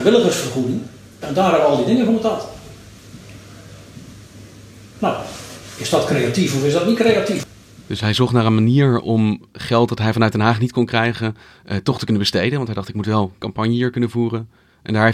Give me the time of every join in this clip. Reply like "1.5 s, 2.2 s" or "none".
1.2 s